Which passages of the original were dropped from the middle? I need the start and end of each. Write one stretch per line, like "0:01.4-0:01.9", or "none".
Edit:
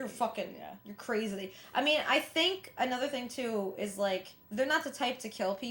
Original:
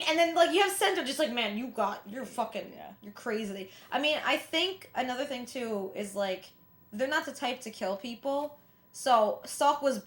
0:06.6-0:06.8

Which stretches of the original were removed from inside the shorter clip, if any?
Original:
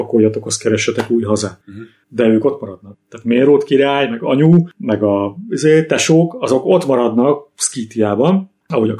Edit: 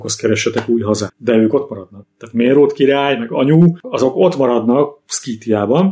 0:01.5-0:02.0
0:04.7-0:06.3

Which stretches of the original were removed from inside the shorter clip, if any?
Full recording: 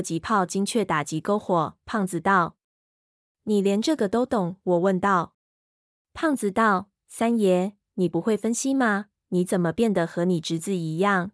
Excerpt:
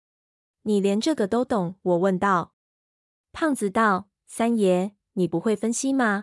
none

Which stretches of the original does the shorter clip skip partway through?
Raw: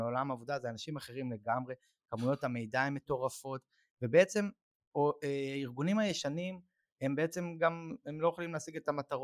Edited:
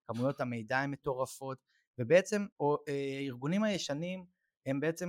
0:04.6-0:04.9

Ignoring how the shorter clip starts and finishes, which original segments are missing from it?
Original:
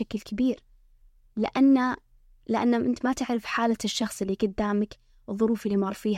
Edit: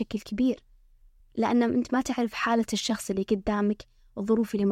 0:01.2-0:02.3

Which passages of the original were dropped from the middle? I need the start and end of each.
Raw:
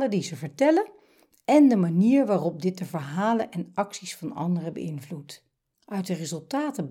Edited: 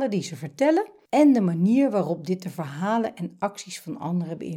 0:01.1-0:01.4

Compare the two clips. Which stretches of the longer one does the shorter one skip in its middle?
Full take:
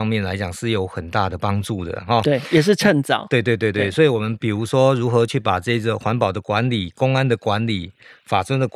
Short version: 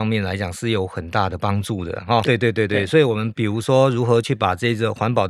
0:02.2-0:03.3

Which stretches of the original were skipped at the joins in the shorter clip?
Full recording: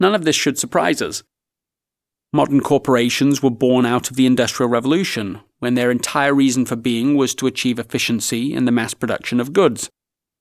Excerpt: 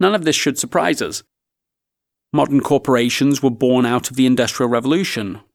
none

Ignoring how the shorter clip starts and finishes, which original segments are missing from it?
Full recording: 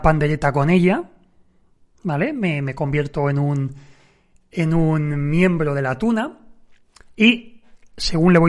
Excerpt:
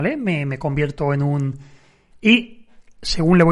0:04.3-0:07.1

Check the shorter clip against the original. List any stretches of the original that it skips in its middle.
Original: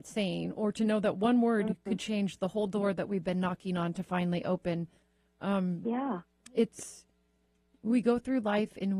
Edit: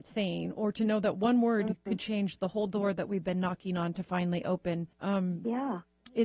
0:04.9-0:05.3

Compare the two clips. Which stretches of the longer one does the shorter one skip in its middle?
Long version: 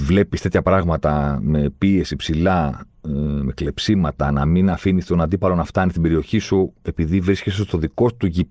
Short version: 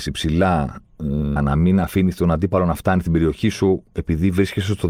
0:03.4-0:04.3

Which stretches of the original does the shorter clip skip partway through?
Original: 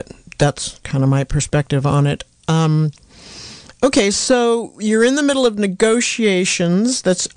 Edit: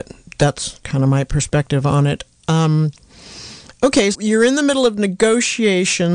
0:04.1-0:04.7

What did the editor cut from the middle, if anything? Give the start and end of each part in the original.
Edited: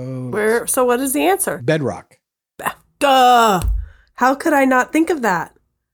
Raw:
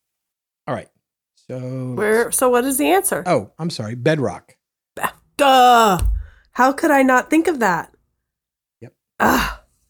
0:03.2-0:04.0

